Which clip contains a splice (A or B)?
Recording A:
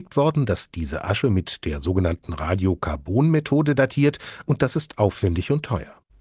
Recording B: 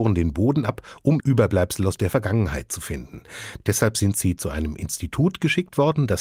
B